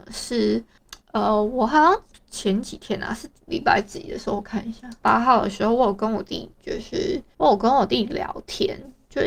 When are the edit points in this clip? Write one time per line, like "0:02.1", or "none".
0:05.0